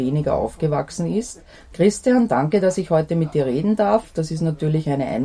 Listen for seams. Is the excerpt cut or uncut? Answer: uncut